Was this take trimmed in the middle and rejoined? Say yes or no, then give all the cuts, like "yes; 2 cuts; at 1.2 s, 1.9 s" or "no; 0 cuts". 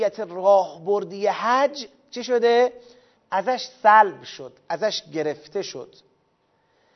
yes; 1 cut; at 3.2 s